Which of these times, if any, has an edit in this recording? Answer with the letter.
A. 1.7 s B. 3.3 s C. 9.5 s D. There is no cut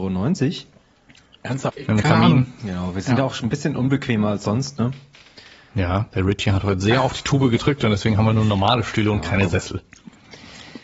A